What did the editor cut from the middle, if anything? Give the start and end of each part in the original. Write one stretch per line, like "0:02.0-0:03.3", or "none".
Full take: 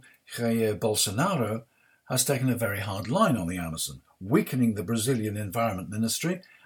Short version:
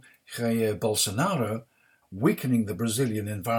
0:02.0-0:04.1